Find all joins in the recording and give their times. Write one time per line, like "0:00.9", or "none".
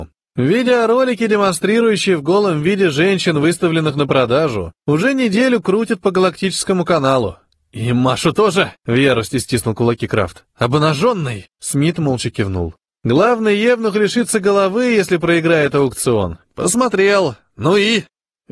0:12.9
0:16.4